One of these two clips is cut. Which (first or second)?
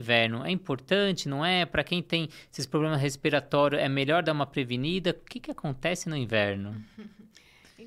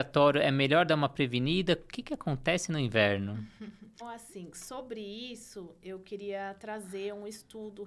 second